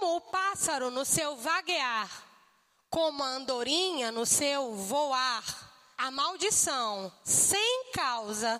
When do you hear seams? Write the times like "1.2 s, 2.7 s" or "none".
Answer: 6.0 s

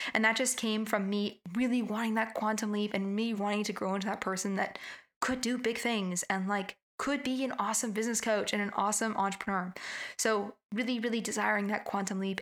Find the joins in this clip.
3.3 s

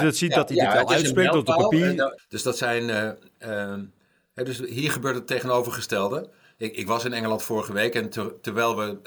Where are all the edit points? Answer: 2.2 s

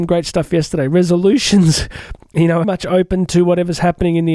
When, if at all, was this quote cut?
2.6 s

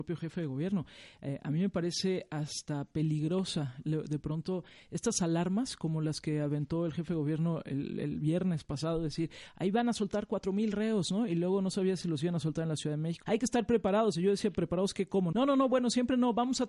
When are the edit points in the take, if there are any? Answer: 13.2 s, 15.3 s

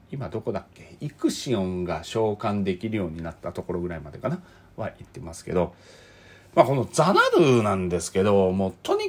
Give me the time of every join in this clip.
none

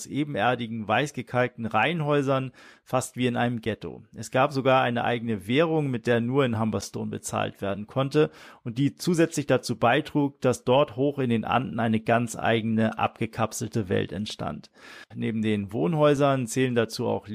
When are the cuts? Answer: 15.1 s

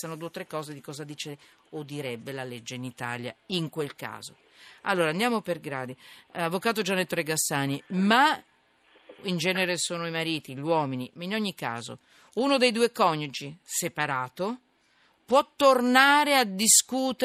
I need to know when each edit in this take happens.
none

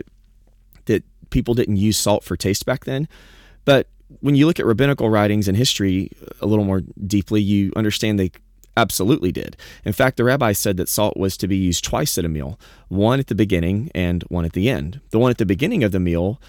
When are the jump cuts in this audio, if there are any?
none

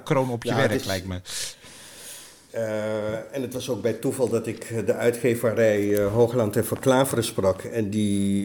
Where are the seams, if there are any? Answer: 2.5 s

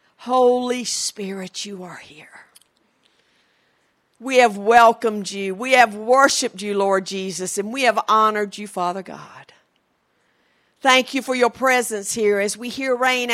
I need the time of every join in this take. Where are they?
none

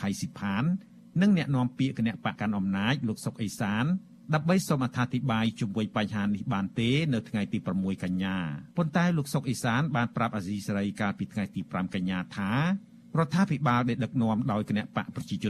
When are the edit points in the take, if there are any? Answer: 2.4 s, 8.7 s

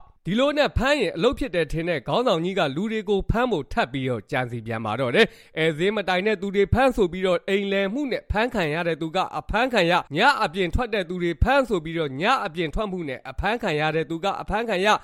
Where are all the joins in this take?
10.1 s

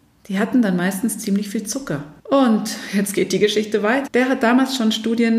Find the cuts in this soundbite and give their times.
2.2 s, 4.1 s

